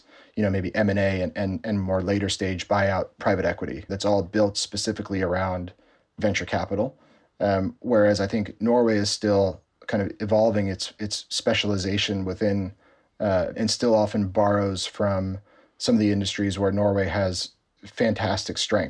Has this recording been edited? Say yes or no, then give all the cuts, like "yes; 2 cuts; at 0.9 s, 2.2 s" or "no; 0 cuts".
yes; 2 cuts; at 3.9 s, 13.5 s